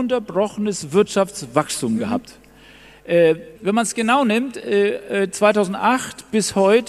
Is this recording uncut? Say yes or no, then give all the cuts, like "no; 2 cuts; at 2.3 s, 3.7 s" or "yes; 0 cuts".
no; 1 cut; at 3.6 s